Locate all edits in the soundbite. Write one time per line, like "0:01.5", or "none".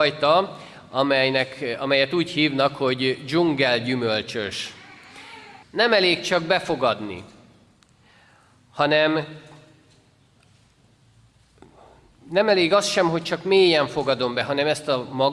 0:05.6